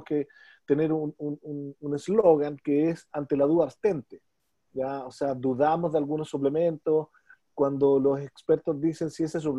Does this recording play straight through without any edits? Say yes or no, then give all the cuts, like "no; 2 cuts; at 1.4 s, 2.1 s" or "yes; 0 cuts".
yes; 0 cuts